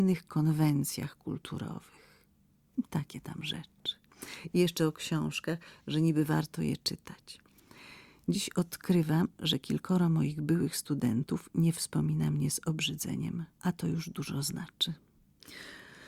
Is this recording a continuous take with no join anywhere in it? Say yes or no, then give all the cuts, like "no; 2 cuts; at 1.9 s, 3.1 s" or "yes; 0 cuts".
no; 1 cut; at 13.5 s